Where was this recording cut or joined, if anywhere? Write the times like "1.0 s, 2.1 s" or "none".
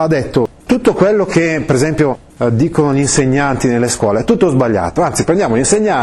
none